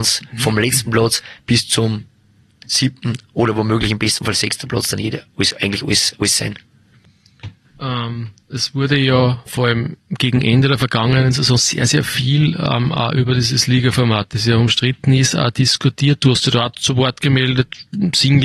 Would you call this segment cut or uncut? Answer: uncut